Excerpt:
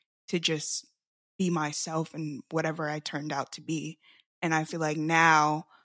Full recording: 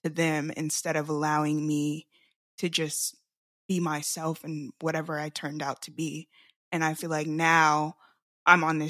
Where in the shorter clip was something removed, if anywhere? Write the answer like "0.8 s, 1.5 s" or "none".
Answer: none